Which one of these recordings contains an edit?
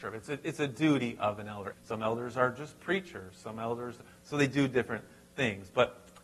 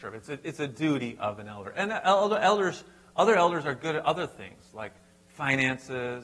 first; 1 cut; at 1.7 s

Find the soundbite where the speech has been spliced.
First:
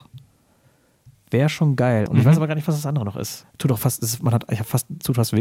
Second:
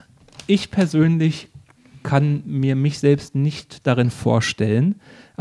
first; 2 cuts; at 2.1 s, 3.4 s

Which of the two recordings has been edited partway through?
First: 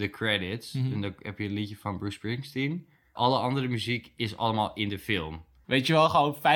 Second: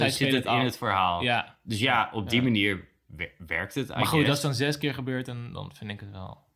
first; 1 cut; at 5.6 s

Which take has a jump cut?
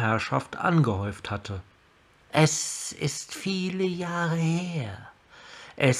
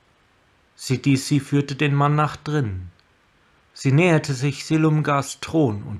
first; 1 cut; at 2.3 s

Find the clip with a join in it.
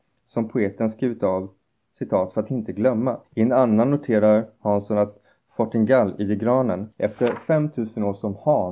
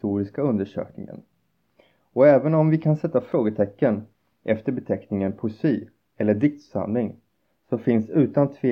first; 2 cuts; at 3.2 s, 6.9 s

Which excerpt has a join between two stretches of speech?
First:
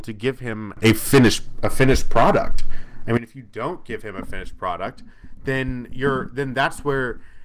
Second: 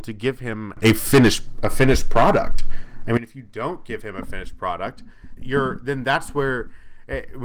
second; 1 cut; at 5.4 s

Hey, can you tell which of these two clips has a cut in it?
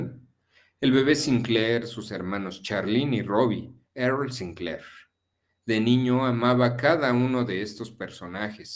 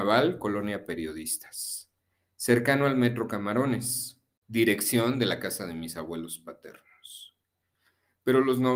first; 1 cut; at 3.8 s

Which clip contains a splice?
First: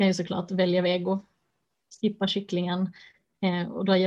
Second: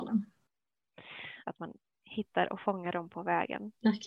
second; 1 cut; at 1.4 s

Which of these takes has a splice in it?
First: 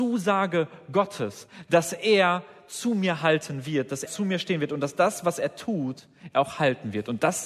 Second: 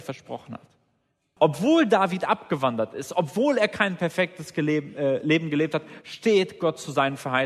first; 1 cut; at 4.1 s

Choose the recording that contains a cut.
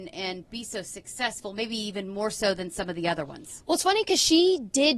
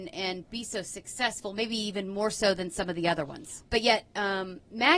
second; 1 cut; at 3.6 s

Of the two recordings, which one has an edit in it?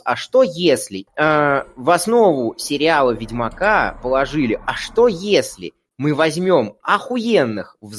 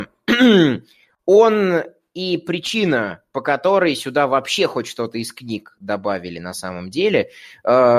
first; 1 cut; at 1.1 s

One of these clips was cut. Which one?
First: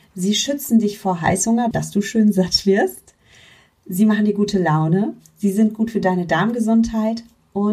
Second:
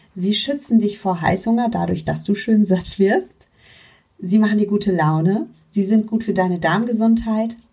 first; 1 cut; at 1.7 s

